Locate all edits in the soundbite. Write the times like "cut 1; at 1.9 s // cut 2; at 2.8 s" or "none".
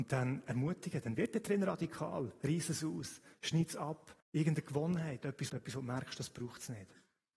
cut 1; at 4.2 s // cut 2; at 5.5 s